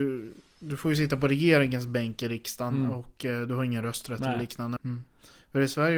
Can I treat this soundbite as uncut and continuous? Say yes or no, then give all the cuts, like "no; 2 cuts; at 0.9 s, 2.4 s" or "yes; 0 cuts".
no; 1 cut; at 4.8 s